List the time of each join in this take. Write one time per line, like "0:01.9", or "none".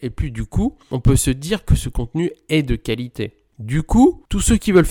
none